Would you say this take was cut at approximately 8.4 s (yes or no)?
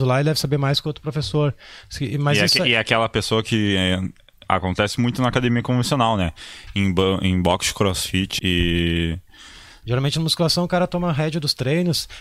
yes